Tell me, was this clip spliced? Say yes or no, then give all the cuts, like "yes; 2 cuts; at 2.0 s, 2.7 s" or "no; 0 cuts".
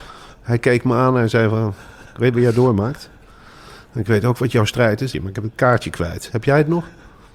yes; 1 cut; at 5.1 s